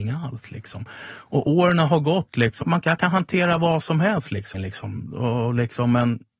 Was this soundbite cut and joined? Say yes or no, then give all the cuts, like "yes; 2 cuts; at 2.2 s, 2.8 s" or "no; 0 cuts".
yes; 2 cuts; at 2.6 s, 4.5 s